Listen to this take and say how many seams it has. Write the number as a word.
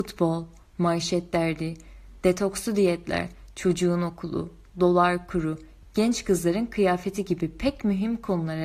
one